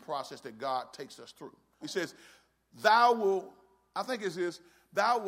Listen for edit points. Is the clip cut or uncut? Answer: cut